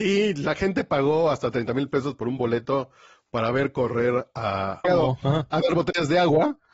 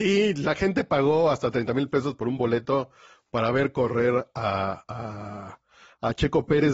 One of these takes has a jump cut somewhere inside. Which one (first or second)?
first